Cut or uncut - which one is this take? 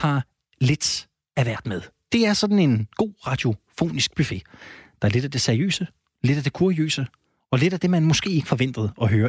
uncut